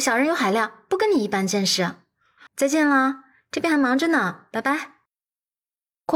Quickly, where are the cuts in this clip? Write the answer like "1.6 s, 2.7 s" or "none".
2.5 s